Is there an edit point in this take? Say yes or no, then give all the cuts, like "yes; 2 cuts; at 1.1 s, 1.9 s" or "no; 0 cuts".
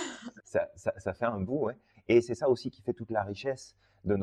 yes; 1 cut; at 1.9 s